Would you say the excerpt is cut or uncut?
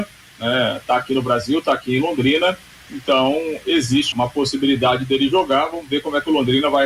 cut